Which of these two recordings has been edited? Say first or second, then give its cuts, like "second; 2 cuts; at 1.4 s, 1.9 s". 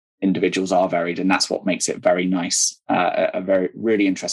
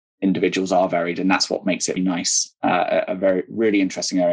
second; 1 cut; at 2.0 s